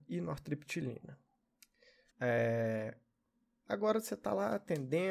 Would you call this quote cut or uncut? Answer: cut